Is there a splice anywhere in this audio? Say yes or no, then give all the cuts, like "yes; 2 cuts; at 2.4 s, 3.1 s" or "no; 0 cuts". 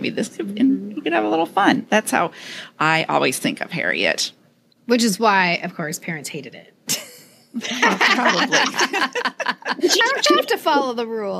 no; 0 cuts